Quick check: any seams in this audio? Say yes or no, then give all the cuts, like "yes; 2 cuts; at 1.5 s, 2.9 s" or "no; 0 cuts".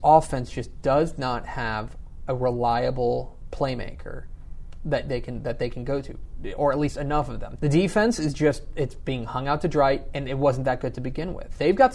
yes; 1 cut; at 7.6 s